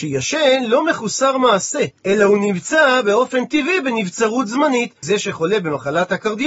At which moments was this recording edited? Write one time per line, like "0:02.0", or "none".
0:02.0
0:05.0